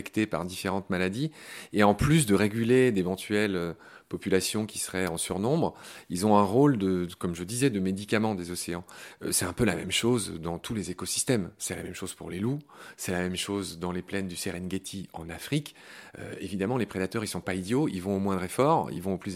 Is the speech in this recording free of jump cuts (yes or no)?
yes